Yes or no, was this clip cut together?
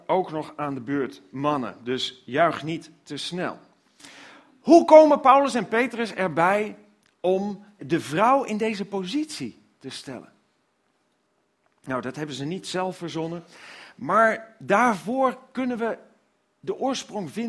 yes